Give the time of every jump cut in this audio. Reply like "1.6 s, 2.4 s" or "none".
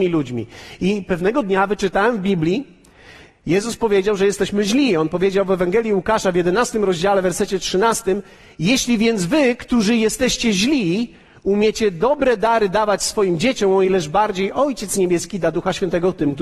none